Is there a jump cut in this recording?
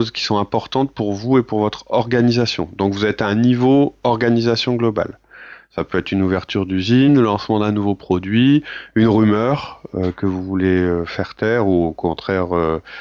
no; 0 cuts

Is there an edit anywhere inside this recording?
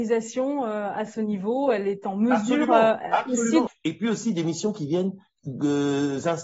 yes; 2 cuts; at 3.7 s, 5.4 s

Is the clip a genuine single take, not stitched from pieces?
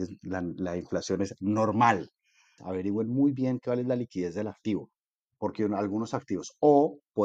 no; 1 cut; at 2.6 s

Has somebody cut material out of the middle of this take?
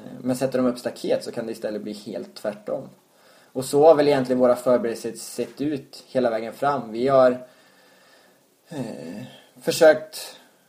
no; 0 cuts

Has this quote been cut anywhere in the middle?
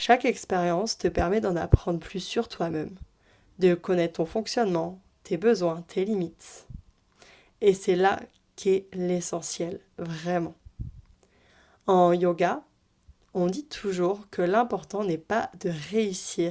no; 0 cuts

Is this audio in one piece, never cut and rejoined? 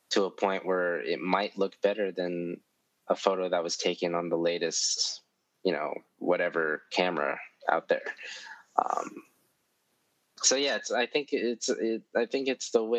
yes; 0 cuts

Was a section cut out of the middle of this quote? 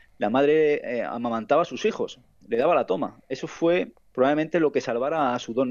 no; 0 cuts

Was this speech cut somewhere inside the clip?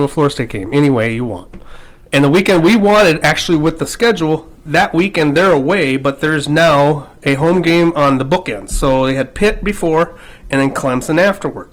no; 0 cuts

